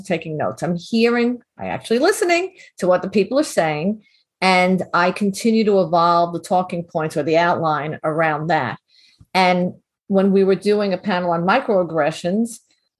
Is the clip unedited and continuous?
yes; 0 cuts

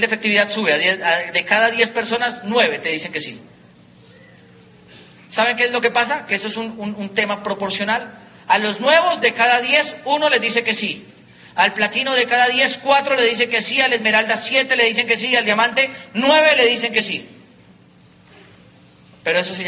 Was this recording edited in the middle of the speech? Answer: no; 0 cuts

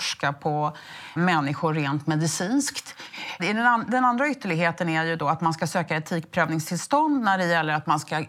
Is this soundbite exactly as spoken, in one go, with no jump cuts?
no; 2 cuts; at 1.2 s, 3.4 s

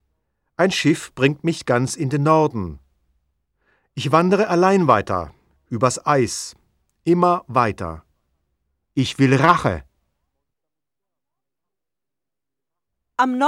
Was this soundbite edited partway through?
yes; 1 cut; at 8.8 s

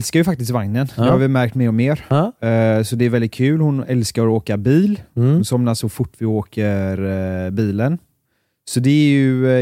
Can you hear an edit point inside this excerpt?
no; 0 cuts

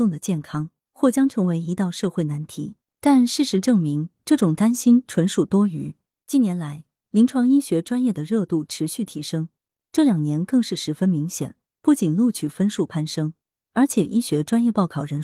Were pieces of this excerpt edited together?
no; 0 cuts

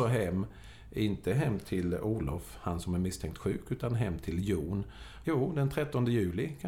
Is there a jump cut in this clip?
yes; 1 cut; at 5.2 s

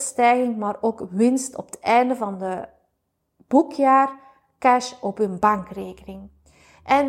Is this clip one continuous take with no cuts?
yes; 0 cuts

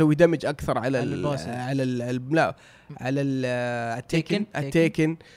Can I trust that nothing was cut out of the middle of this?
yes; 0 cuts

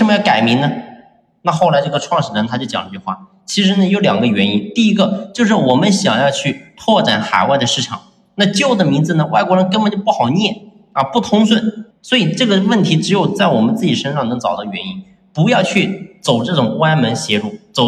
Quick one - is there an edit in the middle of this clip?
yes; 1 cut; at 11.9 s

